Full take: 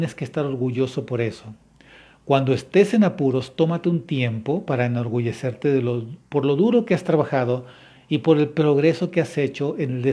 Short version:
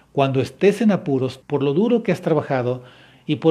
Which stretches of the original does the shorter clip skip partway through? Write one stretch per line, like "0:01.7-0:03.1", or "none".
0:03.5-0:06.2